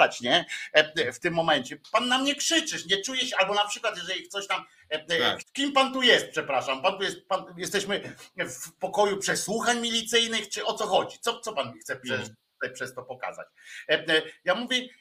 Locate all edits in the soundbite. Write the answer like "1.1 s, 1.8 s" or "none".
5.4 s